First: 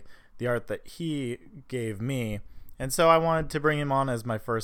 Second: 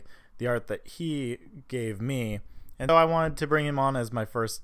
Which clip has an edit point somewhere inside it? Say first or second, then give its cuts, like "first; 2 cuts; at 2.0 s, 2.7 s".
second; 1 cut; at 2.9 s